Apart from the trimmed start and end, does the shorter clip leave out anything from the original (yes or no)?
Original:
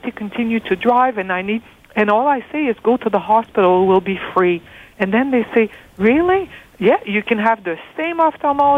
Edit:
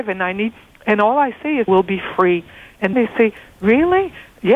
yes